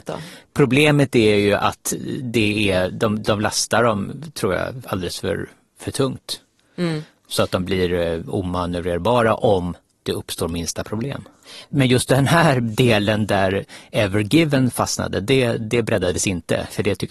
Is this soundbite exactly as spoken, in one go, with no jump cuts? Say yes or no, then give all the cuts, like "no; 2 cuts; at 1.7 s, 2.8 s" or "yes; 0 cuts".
no; 1 cut; at 11.6 s